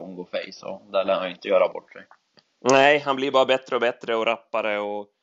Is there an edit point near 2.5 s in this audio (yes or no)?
no